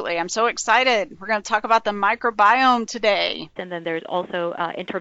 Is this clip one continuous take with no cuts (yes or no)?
no